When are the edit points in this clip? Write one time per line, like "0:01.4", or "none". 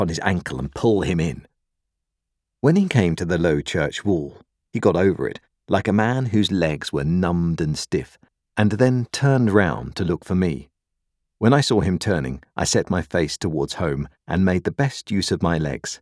none